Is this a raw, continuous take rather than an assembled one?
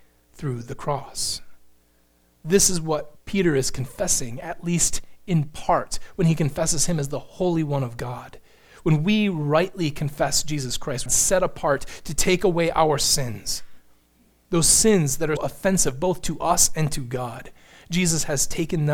no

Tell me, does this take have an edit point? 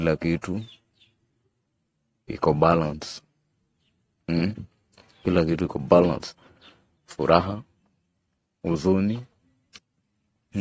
no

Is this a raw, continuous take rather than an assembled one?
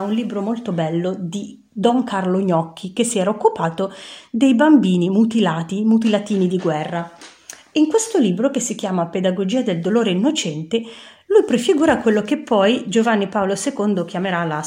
yes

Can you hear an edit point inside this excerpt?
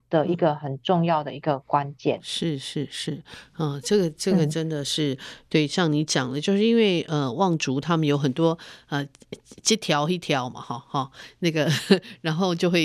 no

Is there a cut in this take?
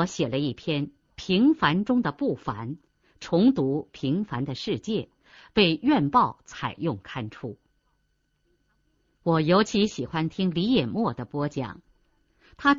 yes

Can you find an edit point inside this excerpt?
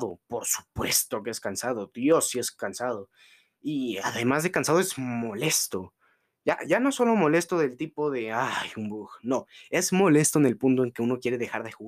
no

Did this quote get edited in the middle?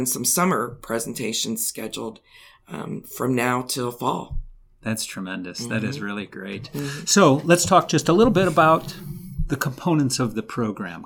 no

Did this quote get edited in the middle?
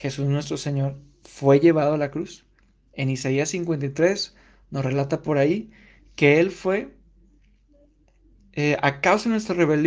no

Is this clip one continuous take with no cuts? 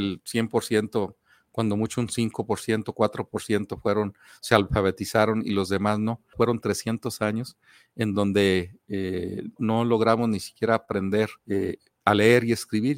no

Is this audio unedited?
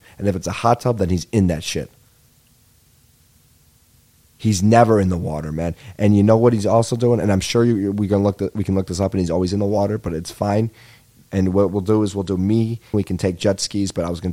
no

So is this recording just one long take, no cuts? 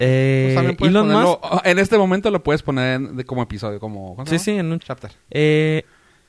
no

